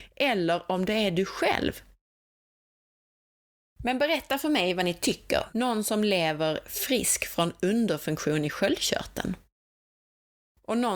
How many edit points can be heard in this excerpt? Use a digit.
1